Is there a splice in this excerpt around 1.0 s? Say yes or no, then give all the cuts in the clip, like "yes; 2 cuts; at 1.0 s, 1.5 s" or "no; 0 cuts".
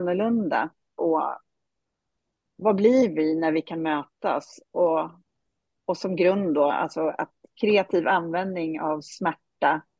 yes; 1 cut; at 1.0 s